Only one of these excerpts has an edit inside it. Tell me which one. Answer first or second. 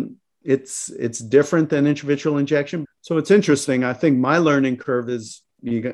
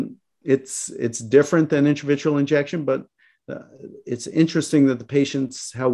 first